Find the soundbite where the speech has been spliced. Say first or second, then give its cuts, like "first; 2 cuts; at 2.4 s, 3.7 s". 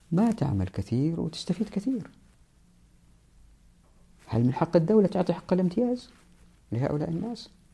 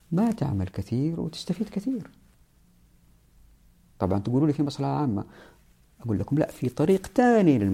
second; 1 cut; at 3.8 s